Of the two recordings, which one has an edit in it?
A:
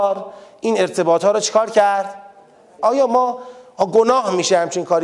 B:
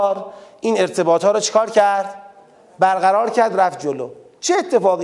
A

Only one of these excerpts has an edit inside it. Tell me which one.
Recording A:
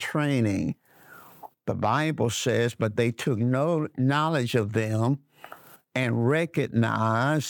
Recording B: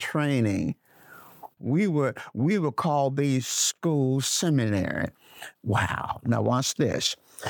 B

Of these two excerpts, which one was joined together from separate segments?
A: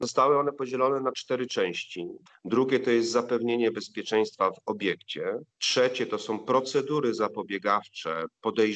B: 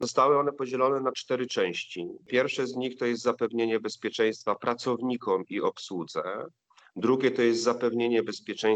A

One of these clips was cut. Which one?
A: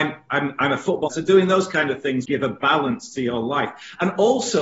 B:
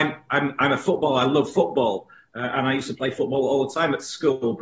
A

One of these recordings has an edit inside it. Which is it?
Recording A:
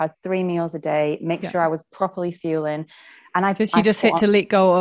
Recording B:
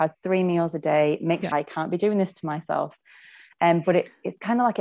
B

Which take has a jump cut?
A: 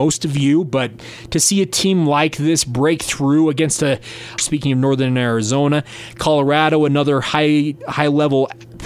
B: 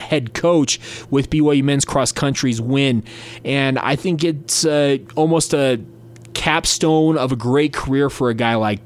A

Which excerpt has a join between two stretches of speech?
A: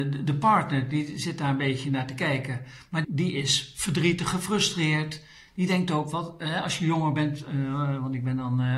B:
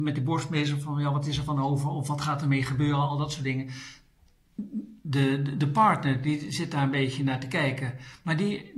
A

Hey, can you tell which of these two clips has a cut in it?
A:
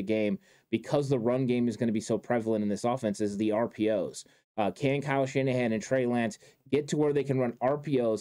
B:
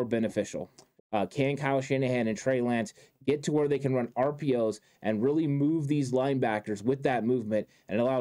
B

